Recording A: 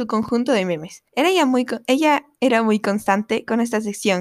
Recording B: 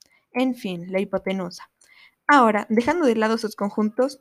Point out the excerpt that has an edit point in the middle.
A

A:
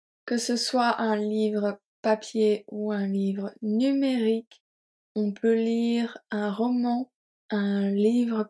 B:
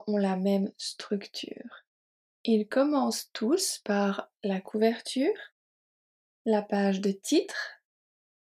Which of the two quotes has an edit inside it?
A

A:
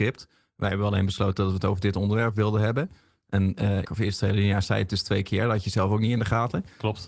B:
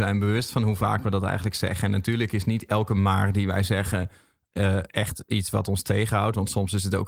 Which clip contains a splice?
A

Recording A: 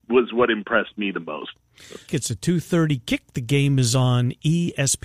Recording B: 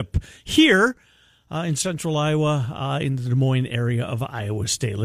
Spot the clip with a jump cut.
A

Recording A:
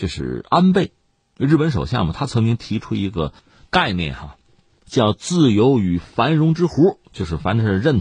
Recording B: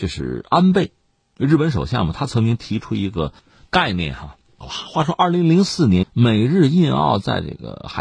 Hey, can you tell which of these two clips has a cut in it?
B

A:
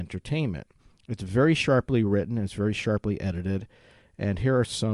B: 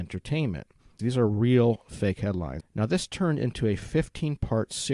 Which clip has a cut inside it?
B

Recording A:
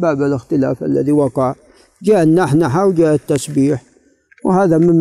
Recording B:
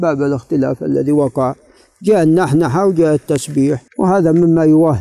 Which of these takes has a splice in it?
B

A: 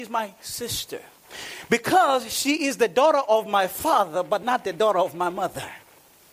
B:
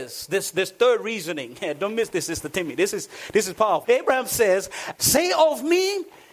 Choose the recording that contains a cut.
B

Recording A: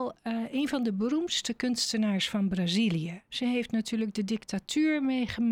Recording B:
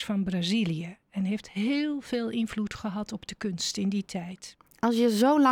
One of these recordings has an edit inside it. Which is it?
A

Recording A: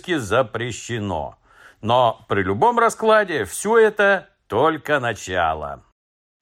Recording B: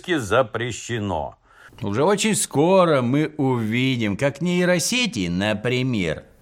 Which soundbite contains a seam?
B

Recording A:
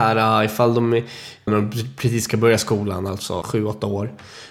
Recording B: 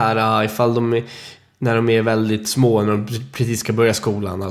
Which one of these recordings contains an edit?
A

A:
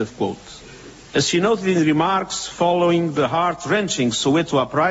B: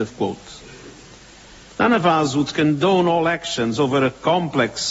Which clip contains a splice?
A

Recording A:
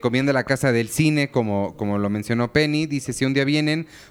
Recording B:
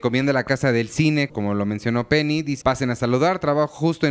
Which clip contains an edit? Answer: B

